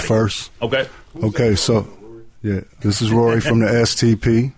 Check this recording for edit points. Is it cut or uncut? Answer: cut